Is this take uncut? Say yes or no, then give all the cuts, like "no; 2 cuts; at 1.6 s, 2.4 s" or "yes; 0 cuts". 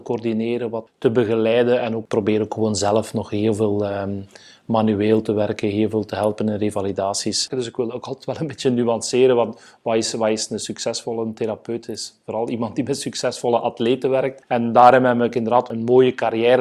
no; 1 cut; at 7.5 s